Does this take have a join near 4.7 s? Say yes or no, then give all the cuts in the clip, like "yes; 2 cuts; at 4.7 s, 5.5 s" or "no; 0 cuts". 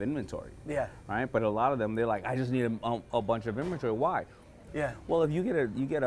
yes; 1 cut; at 4.7 s